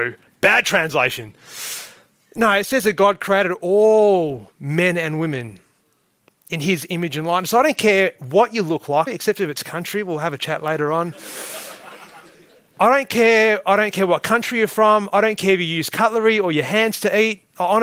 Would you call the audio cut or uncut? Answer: cut